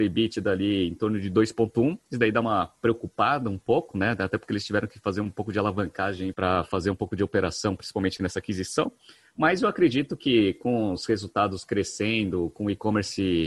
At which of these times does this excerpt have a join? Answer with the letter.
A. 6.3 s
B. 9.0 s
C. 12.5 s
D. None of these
A